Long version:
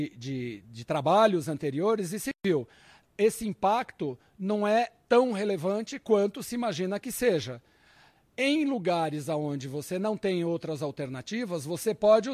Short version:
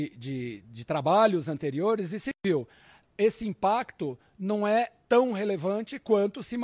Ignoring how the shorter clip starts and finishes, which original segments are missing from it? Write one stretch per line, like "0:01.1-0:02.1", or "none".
none